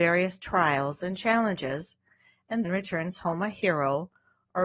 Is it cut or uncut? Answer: cut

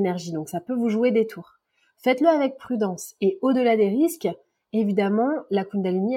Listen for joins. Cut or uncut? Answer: uncut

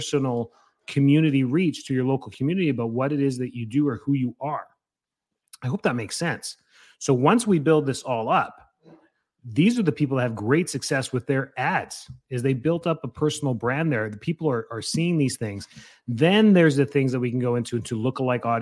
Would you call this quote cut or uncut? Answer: uncut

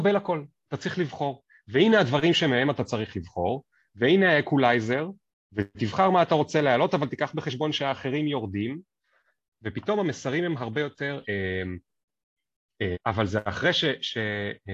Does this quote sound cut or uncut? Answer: cut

